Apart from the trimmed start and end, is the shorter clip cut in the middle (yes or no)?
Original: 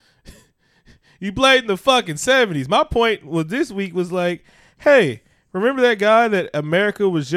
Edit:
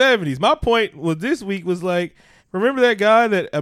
yes